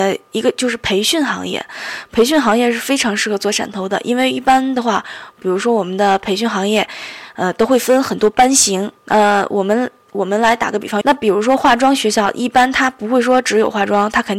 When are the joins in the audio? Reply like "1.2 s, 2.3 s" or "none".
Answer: 9.0 s, 11.0 s